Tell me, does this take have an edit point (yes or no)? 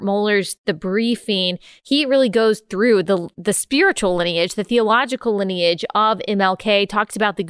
no